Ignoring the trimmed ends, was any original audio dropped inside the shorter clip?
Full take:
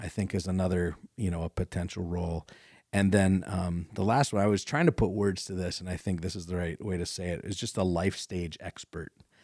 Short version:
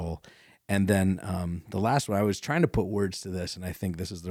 no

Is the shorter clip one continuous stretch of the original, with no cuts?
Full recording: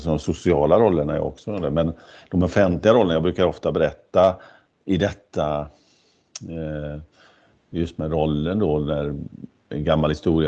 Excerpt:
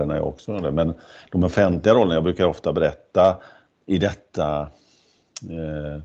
yes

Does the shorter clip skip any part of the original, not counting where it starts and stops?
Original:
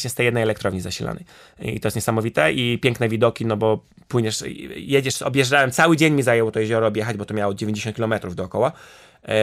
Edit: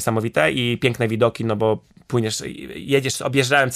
no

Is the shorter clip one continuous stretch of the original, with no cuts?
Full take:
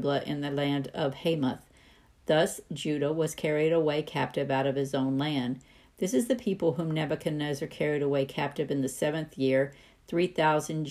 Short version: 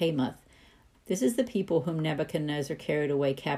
no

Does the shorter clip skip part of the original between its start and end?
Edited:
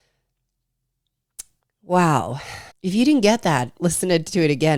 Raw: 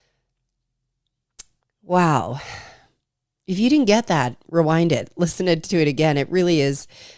yes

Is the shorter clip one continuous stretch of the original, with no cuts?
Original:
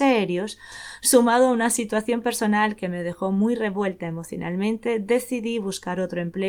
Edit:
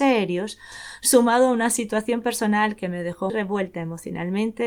no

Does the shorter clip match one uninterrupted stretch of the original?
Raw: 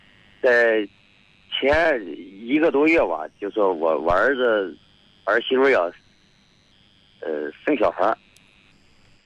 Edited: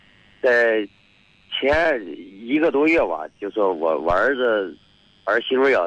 yes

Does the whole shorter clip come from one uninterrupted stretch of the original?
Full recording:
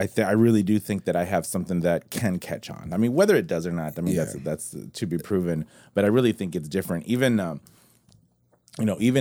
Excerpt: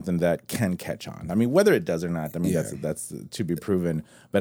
yes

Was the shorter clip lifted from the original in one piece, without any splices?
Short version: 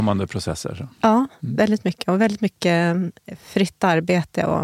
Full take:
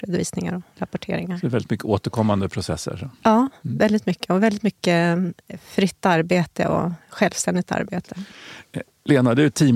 yes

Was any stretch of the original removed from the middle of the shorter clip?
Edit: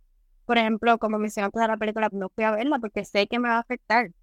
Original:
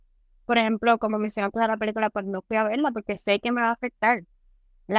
yes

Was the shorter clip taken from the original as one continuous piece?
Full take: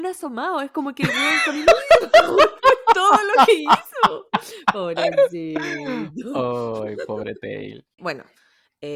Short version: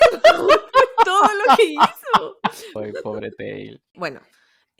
no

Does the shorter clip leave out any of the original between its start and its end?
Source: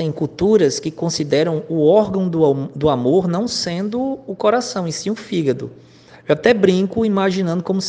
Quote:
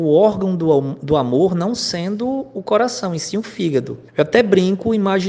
yes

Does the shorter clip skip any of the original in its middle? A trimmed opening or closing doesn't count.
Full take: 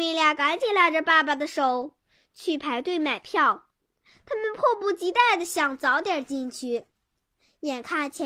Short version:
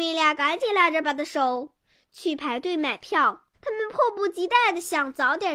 yes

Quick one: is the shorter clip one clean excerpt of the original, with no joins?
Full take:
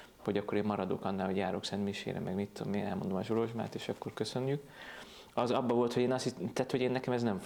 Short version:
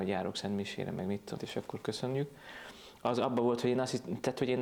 no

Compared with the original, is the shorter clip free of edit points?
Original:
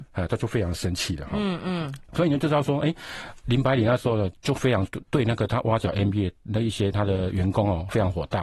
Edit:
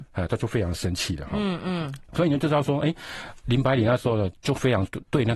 yes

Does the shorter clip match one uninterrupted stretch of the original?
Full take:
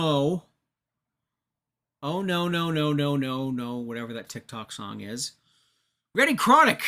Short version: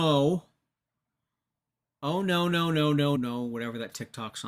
no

